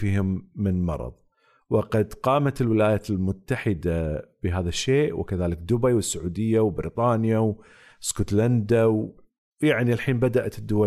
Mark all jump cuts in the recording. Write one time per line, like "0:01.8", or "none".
none